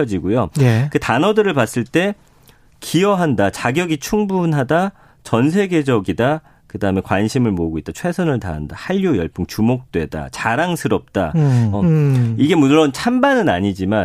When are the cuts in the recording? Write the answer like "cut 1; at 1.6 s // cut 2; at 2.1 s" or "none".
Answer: cut 1; at 11.7 s